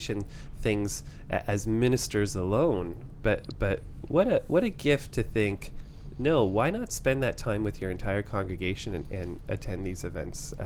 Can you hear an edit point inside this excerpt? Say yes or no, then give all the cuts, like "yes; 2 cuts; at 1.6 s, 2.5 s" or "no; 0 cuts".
no; 0 cuts